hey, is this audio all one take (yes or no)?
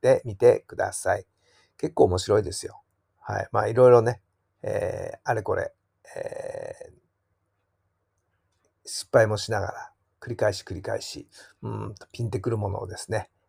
yes